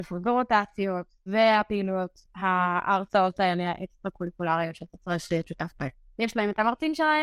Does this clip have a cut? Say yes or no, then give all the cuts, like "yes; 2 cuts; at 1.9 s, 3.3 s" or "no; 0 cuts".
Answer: yes; 2 cuts; at 1.3 s, 6.2 s